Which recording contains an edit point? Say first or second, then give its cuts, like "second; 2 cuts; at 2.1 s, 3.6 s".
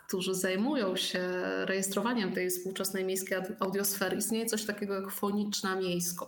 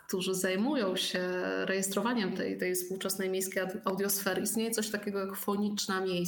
first; 1 cut; at 2.3 s